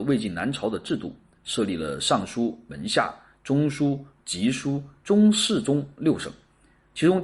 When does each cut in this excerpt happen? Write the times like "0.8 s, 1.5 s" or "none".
4.2 s